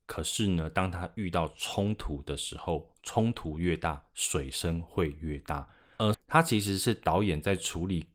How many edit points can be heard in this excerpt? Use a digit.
1